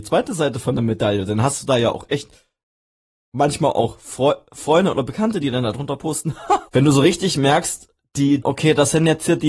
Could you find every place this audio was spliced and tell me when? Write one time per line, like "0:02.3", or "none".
0:06.7
0:08.4